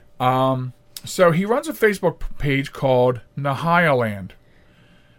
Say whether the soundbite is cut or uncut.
cut